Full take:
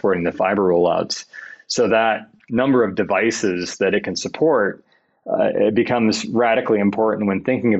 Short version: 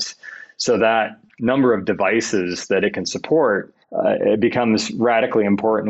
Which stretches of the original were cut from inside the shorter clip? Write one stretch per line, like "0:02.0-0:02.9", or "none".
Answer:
0:04.9-0:05.2